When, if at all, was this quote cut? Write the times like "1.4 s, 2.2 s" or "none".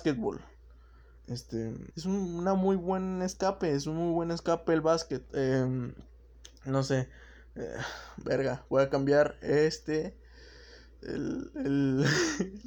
1.9 s